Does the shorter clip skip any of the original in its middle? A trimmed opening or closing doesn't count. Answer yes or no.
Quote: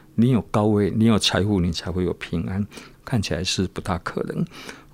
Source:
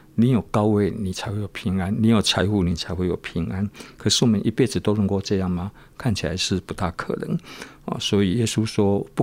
yes